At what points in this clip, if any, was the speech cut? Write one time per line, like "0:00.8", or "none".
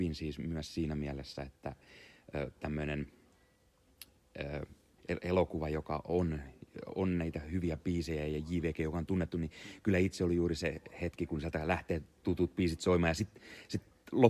0:05.0